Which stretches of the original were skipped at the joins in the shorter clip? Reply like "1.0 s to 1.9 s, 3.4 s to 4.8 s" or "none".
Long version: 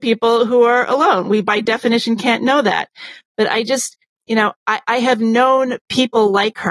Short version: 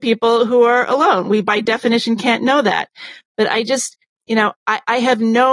none